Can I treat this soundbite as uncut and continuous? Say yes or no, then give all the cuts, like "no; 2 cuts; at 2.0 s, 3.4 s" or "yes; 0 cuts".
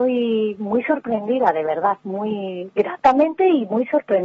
yes; 0 cuts